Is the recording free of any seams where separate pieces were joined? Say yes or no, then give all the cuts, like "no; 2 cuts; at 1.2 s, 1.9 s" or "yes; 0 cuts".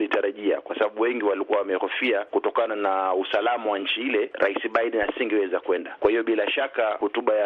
no; 1 cut; at 6.0 s